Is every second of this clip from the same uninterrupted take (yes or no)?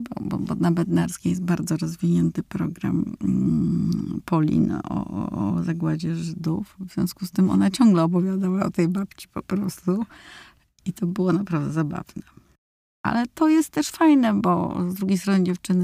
yes